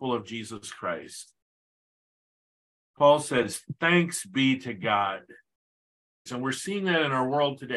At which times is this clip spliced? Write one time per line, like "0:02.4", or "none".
0:06.3